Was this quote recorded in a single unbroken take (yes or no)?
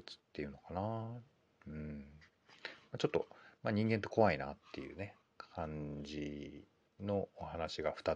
yes